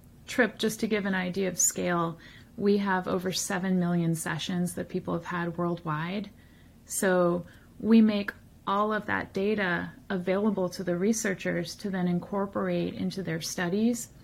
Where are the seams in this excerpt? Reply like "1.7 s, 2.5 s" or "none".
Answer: none